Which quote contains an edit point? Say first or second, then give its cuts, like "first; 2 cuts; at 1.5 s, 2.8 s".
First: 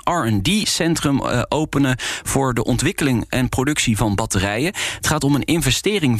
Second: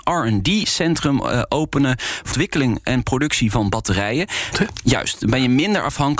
second; 2 cuts; at 2.3 s, 4.5 s